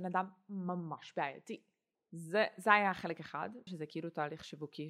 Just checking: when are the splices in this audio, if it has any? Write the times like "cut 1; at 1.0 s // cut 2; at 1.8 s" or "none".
cut 1; at 1.9 s // cut 2; at 3.7 s

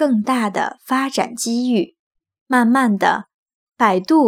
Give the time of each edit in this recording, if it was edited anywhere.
cut 1; at 2.4 s

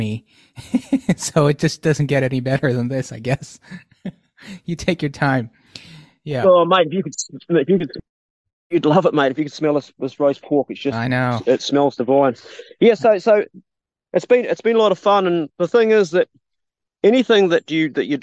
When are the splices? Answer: none

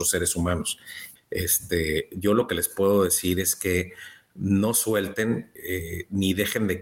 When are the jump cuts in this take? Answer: cut 1; at 1.2 s // cut 2; at 5.6 s

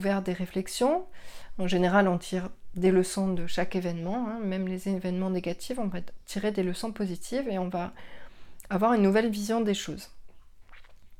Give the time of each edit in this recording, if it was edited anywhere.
none

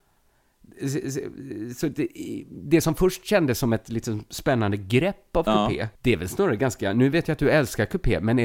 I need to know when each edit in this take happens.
cut 1; at 6.0 s

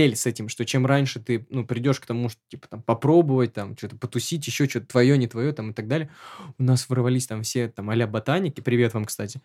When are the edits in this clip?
none

